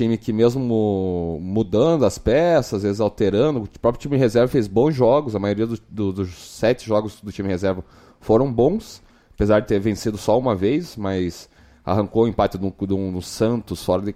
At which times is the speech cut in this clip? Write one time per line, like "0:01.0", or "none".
none